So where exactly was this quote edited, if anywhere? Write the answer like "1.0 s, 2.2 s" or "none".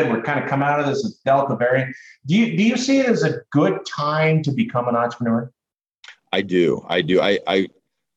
none

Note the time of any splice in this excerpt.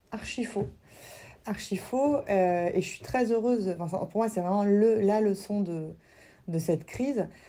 none

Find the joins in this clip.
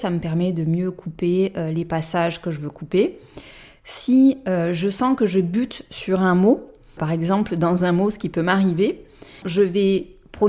7.0 s, 9.4 s

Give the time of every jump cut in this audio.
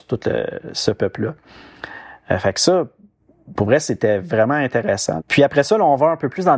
5.2 s

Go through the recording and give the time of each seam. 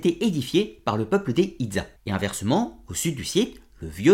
2.0 s

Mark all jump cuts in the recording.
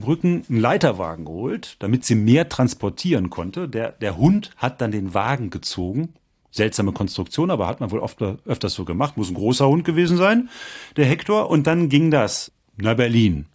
none

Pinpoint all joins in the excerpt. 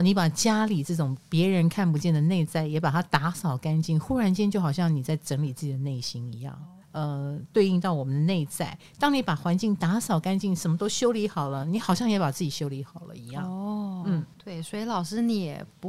6.8 s

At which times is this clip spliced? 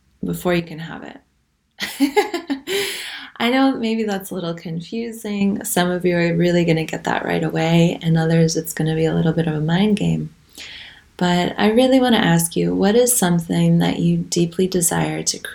none

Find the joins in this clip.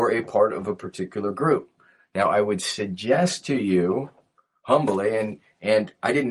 none

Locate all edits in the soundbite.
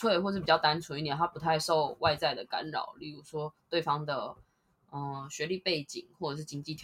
none

